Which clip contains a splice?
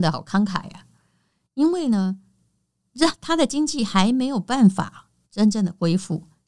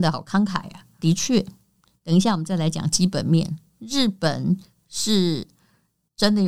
second; 1 cut; at 1.0 s

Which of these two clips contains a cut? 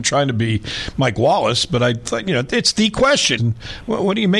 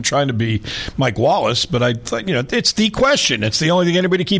first; 1 cut; at 3.4 s

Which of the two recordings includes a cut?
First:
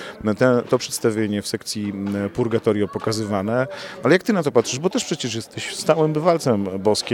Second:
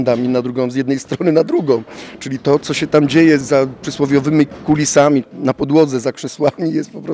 second; 2 cuts; at 3.4 s, 5.2 s

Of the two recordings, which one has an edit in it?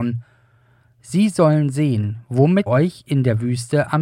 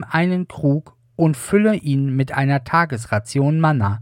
first; 1 cut; at 2.7 s

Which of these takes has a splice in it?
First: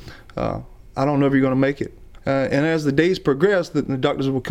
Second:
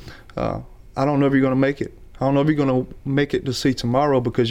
first; 1 cut; at 2.2 s

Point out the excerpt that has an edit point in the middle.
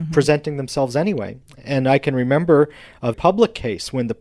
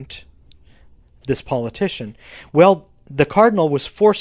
first; 1 cut; at 3.1 s

